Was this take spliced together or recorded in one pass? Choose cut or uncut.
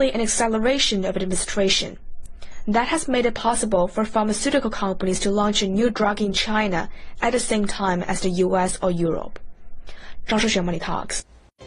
uncut